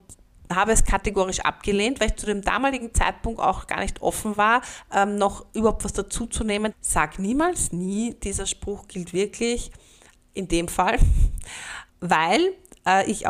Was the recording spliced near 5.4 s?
no; 2 cuts; at 6.7 s, 11.9 s

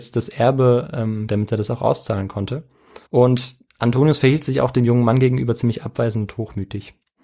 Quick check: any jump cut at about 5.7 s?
no; 2 cuts; at 1.3 s, 3.1 s

